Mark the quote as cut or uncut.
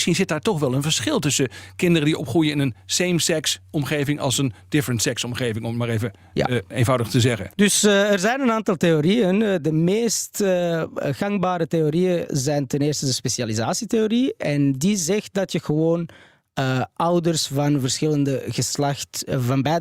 cut